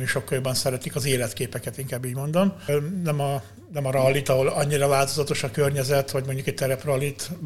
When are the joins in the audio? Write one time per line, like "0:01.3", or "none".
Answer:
0:02.7